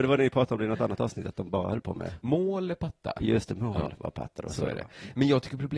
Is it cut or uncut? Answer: uncut